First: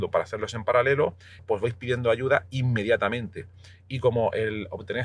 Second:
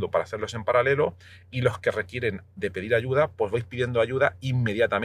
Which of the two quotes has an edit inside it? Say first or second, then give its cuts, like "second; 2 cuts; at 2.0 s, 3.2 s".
first; 1 cut; at 1.4 s